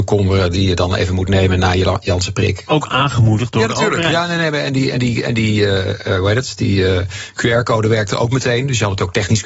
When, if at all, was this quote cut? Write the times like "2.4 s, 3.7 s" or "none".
none

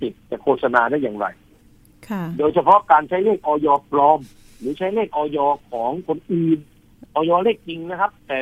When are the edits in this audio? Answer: 7.1 s

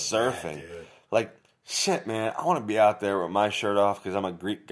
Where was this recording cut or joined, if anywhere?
none

